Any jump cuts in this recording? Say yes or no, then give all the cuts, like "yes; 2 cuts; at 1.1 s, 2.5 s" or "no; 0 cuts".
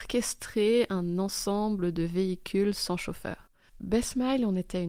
yes; 1 cut; at 3.7 s